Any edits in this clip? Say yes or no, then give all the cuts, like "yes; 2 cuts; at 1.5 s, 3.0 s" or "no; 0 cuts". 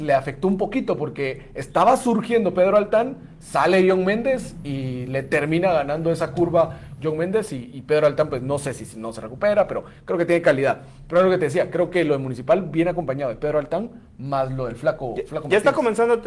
no; 0 cuts